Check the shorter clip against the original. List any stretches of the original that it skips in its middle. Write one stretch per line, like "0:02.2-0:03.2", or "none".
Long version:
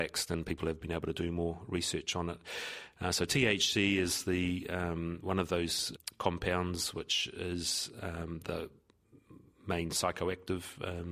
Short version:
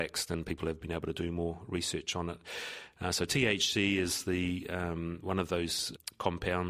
none